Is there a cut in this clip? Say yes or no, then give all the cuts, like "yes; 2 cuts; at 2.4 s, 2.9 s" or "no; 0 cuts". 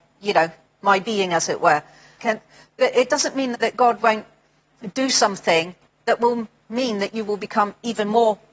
yes; 2 cuts; at 2.2 s, 3.5 s